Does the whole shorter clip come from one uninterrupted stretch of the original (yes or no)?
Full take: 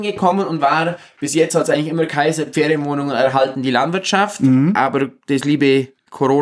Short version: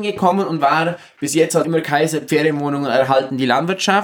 no